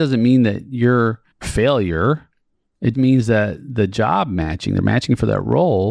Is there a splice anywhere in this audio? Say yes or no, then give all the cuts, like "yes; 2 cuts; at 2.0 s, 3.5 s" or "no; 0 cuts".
yes; 2 cuts; at 1.3 s, 2.9 s